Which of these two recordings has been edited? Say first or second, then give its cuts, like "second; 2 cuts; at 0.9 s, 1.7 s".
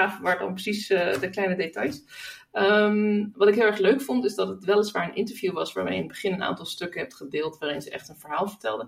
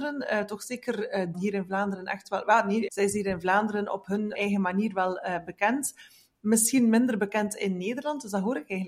second; 3 cuts; at 1.3 s, 2.9 s, 4.3 s